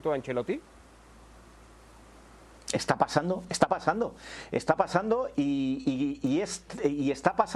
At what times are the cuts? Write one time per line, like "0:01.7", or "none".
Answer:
none